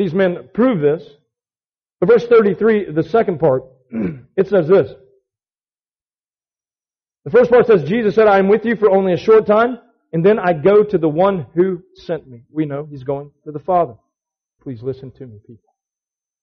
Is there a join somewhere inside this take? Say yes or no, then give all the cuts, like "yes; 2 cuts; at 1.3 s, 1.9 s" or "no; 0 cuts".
yes; 1 cut; at 14.6 s